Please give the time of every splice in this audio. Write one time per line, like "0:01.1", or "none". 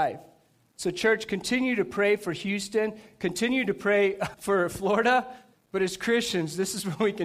0:04.3
0:05.5